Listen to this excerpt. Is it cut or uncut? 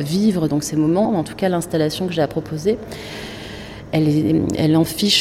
cut